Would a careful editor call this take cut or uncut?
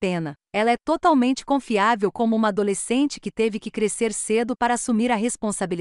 uncut